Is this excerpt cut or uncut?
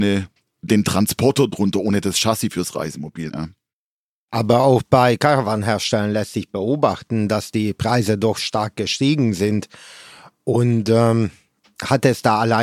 cut